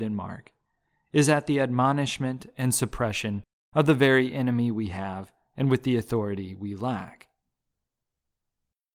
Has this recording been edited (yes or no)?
no